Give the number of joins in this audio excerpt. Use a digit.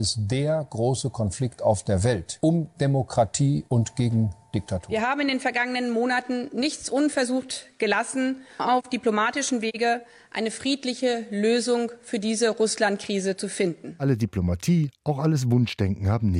1